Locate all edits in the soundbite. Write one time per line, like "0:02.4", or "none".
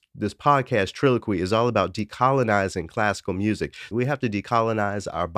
0:03.9